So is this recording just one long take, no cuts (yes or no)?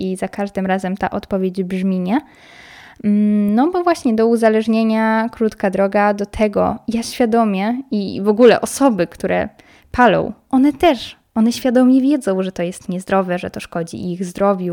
yes